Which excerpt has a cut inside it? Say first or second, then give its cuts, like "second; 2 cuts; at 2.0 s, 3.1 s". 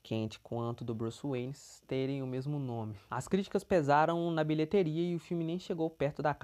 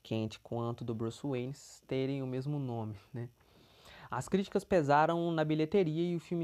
first; 1 cut; at 3.1 s